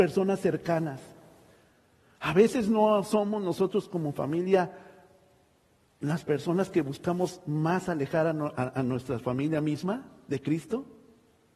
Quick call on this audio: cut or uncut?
uncut